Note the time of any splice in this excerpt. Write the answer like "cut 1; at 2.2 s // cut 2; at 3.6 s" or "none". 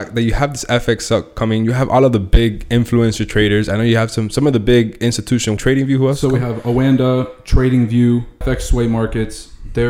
cut 1; at 5.6 s // cut 2; at 8.4 s